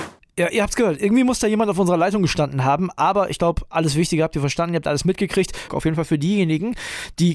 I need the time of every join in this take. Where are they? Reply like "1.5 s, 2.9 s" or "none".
5.7 s

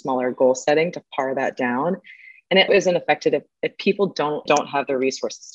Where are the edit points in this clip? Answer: 2.7 s, 4.5 s

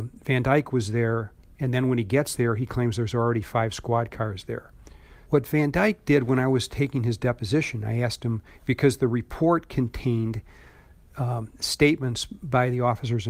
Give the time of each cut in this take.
1.4 s, 5.3 s

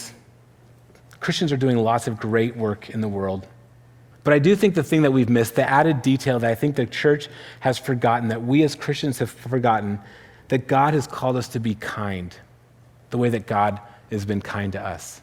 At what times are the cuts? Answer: 4.1 s

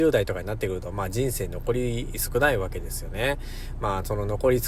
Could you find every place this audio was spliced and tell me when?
none

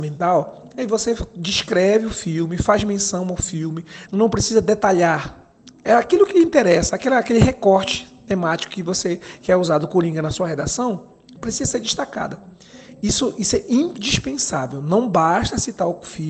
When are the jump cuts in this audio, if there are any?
4.1 s

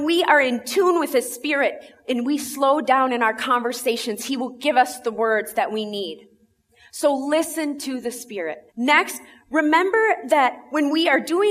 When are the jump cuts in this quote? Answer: 8.7 s

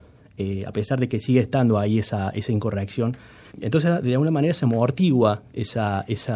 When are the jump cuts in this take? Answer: 3.5 s

